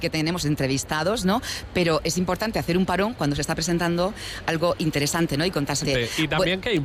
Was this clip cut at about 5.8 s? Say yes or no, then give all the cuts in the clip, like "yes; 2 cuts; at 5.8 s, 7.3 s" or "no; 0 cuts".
yes; 1 cut; at 5.8 s